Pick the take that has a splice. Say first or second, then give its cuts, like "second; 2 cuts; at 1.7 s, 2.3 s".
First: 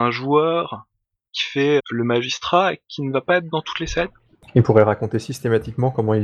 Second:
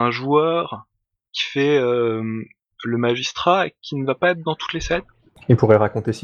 first; 1 cut; at 1.8 s